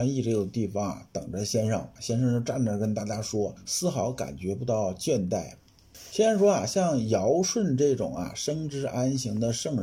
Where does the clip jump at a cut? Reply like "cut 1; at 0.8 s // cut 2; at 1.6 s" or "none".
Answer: cut 1; at 2.0 s // cut 2; at 3.7 s